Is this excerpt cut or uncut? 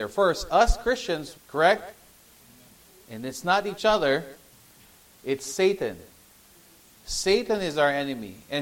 cut